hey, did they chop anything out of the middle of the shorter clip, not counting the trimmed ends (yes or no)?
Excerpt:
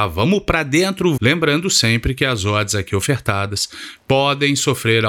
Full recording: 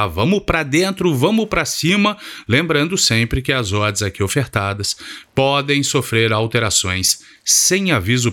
yes